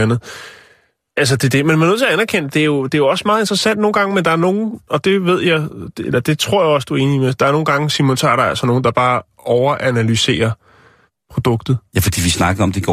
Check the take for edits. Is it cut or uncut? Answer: uncut